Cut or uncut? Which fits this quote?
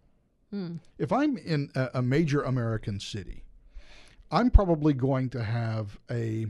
uncut